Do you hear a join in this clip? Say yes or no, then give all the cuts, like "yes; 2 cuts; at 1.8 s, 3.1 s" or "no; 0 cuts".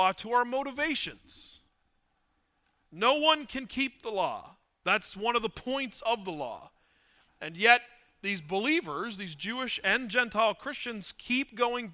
no; 0 cuts